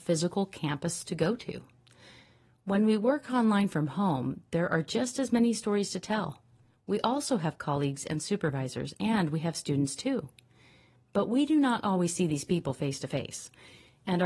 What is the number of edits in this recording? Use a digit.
0